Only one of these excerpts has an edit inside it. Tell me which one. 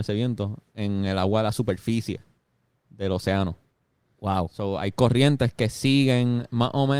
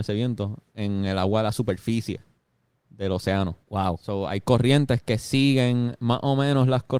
second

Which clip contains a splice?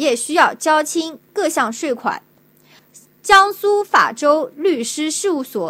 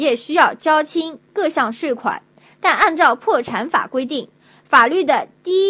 first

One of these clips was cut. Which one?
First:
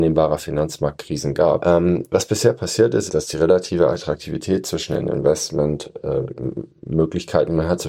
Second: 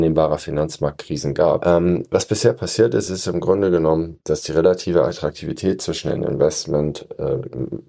first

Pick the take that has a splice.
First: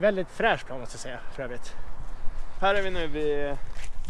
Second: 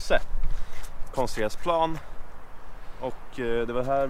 first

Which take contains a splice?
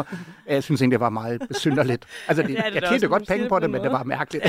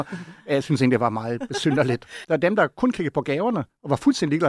second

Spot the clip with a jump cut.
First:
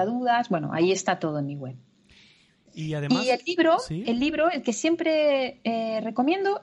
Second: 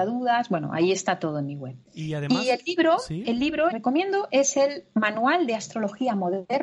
second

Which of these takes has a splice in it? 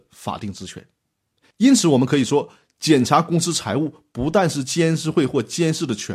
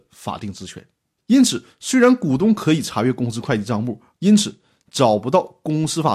second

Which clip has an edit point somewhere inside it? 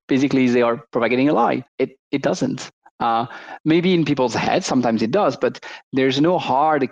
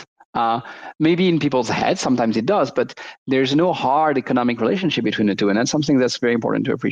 first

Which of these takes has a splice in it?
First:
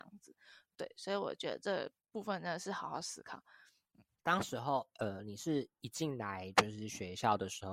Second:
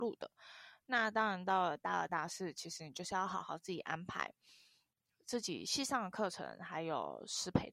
second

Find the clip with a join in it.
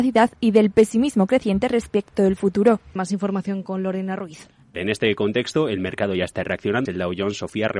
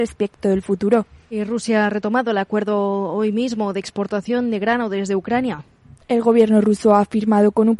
first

